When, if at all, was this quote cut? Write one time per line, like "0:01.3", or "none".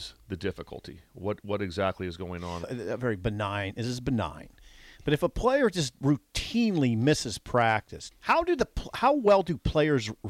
0:02.6
0:08.1